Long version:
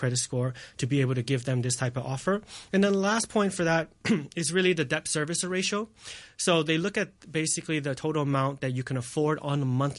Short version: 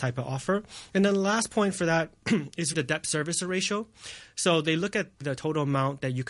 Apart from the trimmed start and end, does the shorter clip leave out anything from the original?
yes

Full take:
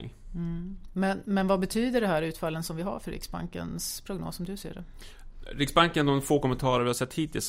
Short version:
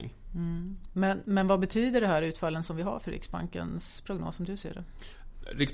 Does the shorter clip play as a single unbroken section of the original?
yes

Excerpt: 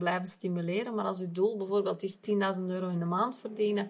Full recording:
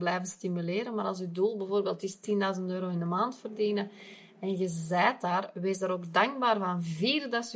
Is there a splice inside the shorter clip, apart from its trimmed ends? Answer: no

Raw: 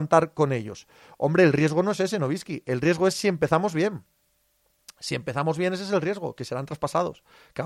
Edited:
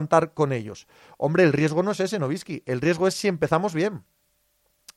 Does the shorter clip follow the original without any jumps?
yes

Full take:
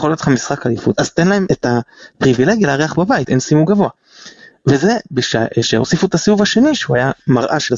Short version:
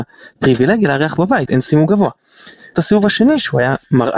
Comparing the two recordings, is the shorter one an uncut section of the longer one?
no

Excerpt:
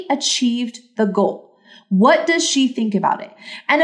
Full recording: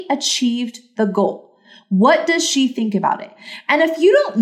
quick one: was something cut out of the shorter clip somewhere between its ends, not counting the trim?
no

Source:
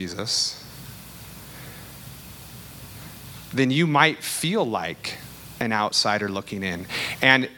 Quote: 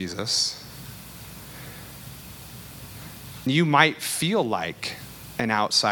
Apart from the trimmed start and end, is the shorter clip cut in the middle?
yes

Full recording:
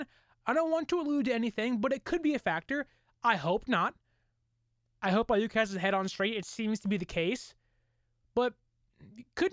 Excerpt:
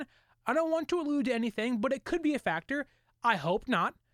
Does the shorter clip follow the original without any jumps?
yes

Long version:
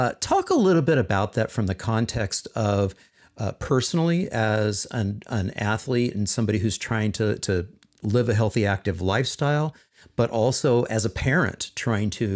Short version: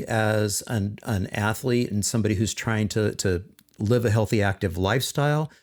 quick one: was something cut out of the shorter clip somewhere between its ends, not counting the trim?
no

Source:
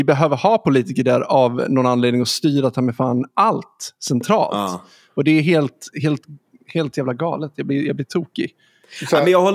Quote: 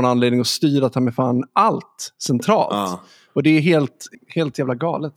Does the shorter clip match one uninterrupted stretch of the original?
no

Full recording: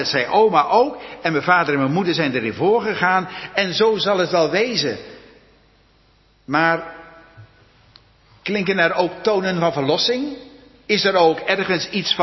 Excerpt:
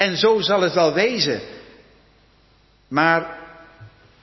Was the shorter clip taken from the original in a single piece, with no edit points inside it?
yes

